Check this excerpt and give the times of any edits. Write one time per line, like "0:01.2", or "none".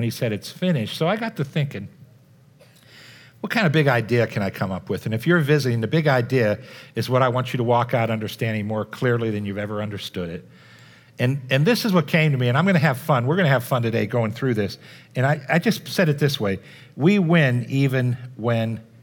none

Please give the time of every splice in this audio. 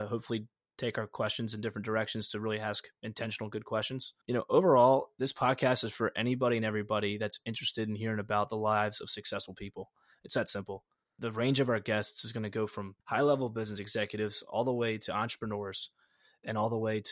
0:04.2
0:13.0

